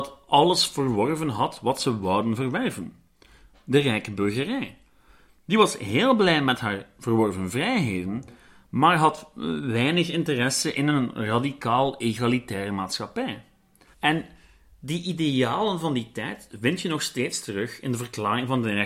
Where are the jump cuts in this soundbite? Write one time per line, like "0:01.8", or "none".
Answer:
0:13.9